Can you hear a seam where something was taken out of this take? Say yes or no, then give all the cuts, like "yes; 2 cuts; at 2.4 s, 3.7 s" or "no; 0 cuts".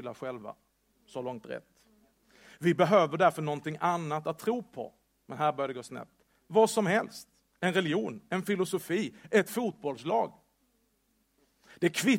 no; 0 cuts